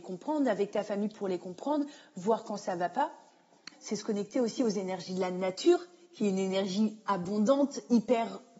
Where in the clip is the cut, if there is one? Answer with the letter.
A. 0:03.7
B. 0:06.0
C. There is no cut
A